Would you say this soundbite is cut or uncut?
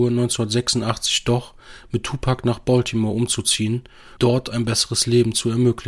cut